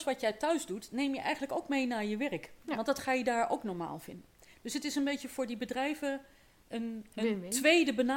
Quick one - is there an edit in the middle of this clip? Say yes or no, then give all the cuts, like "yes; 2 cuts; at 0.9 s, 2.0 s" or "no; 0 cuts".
no; 0 cuts